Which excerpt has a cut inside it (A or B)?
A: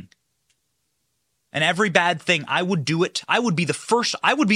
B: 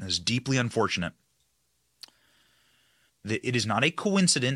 B